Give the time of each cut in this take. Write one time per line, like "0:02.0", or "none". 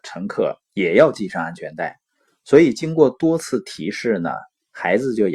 none